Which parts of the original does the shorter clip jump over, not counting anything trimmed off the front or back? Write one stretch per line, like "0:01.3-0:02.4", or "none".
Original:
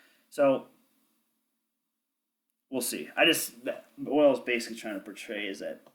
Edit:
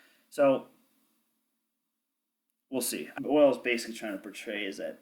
0:03.2-0:04.0